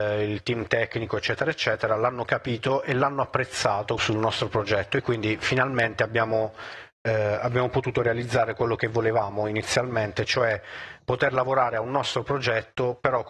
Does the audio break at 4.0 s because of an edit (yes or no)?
yes